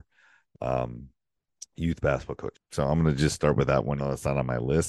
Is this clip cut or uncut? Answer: cut